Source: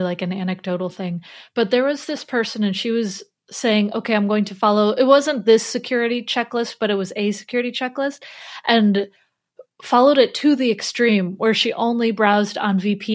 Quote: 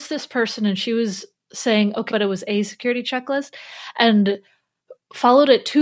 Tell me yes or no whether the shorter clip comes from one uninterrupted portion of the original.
no